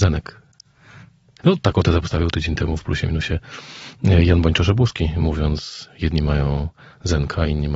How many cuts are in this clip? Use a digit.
1